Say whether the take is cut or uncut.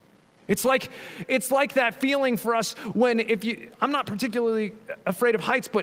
uncut